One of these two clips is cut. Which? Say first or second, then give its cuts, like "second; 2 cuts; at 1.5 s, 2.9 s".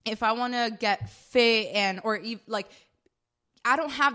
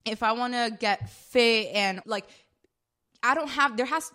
second; 1 cut; at 2.0 s